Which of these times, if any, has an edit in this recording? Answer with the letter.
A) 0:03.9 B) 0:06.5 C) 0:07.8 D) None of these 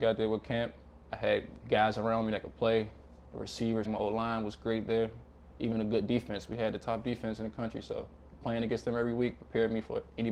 A